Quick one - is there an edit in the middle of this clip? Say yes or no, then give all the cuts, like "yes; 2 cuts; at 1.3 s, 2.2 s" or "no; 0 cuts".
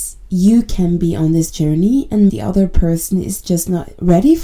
yes; 1 cut; at 2.3 s